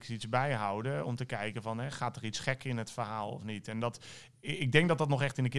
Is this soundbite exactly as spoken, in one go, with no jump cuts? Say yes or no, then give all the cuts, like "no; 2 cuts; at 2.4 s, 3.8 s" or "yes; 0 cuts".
yes; 0 cuts